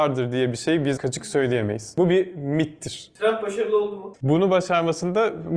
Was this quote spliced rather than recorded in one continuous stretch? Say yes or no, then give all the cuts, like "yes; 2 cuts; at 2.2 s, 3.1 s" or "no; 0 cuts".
yes; 2 cuts; at 1.0 s, 4.1 s